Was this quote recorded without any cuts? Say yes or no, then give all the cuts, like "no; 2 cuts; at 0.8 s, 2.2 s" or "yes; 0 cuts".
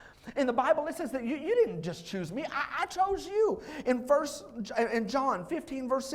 yes; 0 cuts